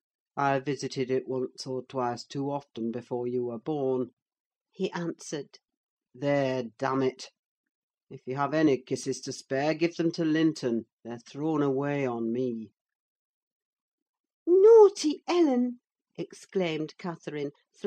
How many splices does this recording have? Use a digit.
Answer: 0